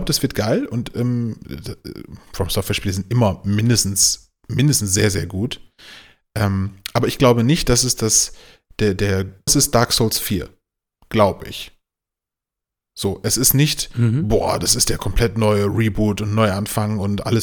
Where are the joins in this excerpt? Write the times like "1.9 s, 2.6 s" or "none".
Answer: 9.5 s